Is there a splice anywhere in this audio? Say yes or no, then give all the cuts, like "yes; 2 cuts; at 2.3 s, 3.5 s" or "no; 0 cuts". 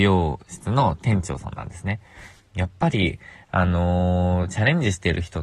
yes; 1 cut; at 2.4 s